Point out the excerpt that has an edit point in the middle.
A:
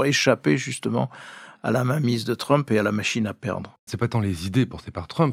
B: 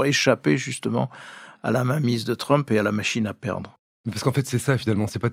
A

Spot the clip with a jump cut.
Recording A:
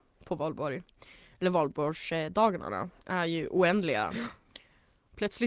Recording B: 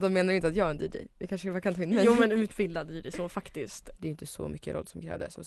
B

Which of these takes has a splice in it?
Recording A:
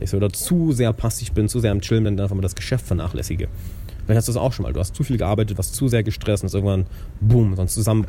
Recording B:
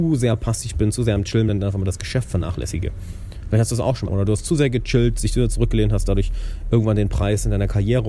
B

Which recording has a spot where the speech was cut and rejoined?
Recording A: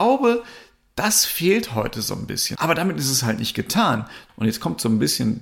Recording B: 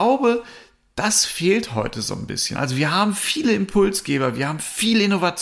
A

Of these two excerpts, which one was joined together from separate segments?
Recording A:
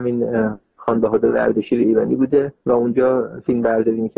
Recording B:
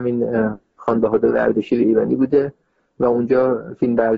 A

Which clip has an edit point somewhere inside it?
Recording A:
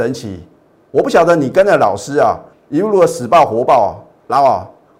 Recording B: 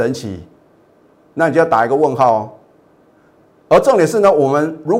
A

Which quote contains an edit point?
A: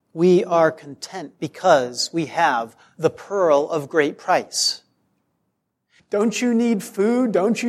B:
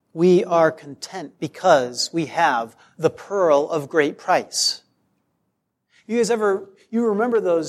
A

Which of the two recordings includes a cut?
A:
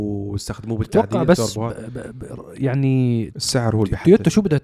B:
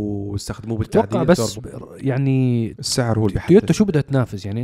B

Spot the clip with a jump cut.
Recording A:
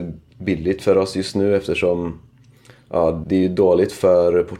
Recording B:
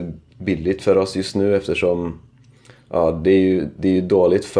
A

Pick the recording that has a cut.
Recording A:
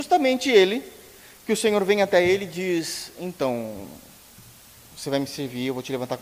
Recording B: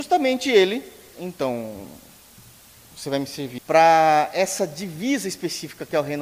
B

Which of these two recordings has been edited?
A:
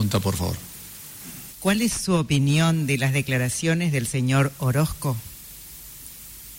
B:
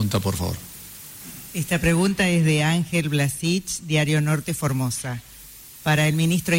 A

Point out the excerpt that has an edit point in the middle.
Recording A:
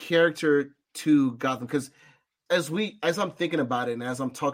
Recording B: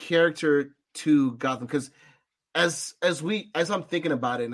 A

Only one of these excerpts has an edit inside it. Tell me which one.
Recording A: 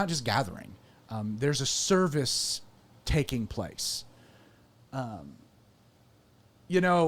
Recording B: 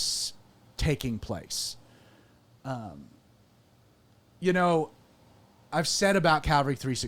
A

